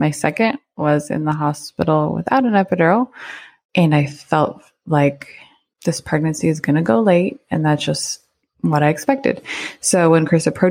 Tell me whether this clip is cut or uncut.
cut